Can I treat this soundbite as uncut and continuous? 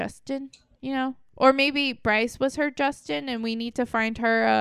yes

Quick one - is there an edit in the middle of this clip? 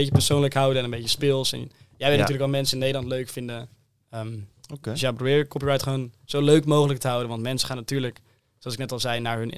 no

